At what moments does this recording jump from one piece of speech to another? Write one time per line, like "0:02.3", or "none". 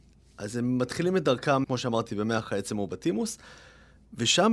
0:01.6